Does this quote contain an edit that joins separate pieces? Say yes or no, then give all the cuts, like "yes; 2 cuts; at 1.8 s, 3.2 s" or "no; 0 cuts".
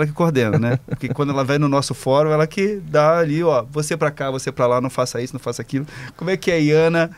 no; 0 cuts